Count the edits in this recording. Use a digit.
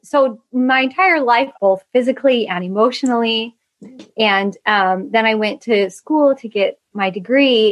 1